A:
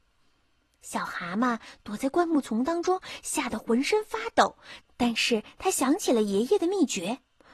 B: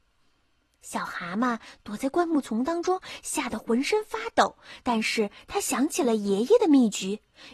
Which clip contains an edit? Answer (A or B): A